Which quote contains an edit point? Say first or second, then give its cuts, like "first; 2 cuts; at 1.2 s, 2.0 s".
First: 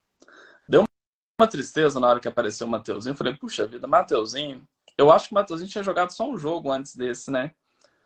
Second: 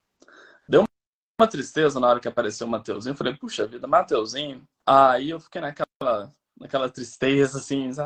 second; 1 cut; at 4.8 s